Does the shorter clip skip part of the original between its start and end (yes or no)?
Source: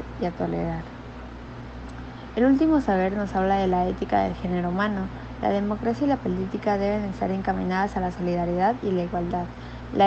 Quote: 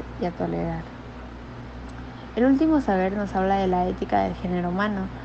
no